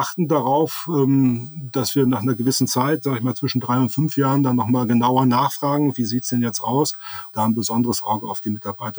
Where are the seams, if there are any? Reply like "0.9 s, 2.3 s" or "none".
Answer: 7.3 s

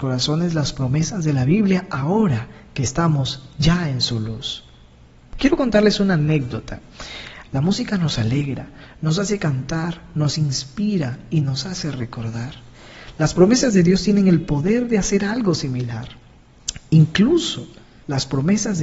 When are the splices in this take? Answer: 7.5 s

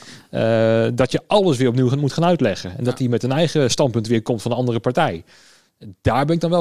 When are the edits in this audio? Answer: none

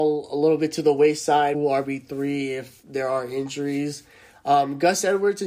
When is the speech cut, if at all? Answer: 1.5 s

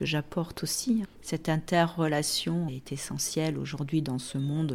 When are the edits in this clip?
1.0 s, 2.7 s

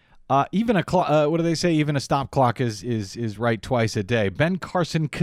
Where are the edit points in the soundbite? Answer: none

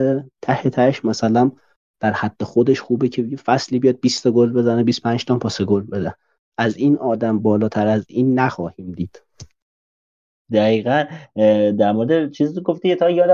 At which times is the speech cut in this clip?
none

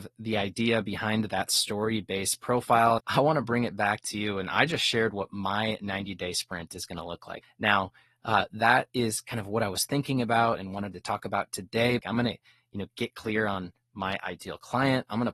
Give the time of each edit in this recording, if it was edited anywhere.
3.0 s, 7.4 s, 12.0 s

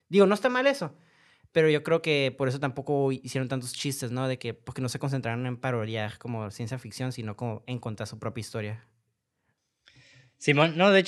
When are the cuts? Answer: none

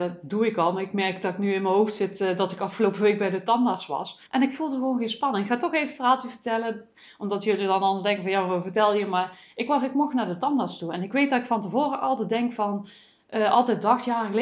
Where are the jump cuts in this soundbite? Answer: 4.3 s

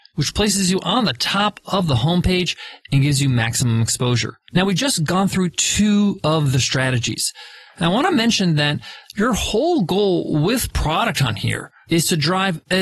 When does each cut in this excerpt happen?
4.4 s, 7.8 s

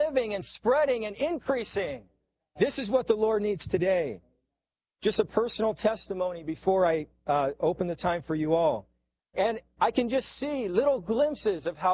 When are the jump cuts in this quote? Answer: 9.2 s

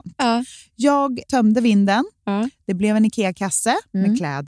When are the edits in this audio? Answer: 1.2 s

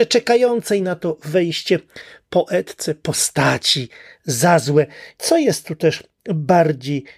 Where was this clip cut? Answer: 5.2 s

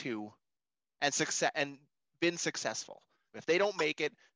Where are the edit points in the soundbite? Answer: 3.3 s

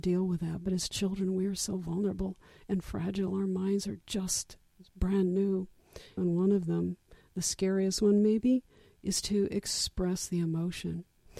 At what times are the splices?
6.2 s

